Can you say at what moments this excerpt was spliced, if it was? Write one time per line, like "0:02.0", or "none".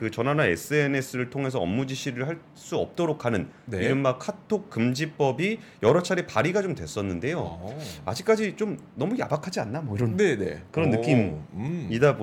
none